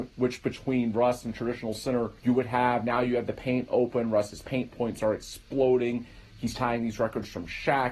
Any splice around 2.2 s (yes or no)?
yes